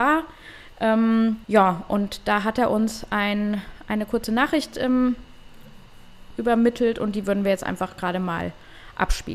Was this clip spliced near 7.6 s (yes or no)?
no